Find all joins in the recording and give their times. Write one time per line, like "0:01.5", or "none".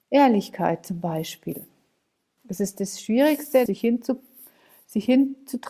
0:02.4
0:03.7